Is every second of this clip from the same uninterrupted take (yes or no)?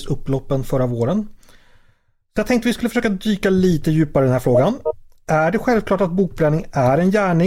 yes